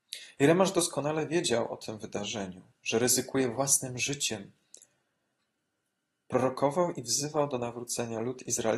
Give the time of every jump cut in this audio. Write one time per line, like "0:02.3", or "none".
none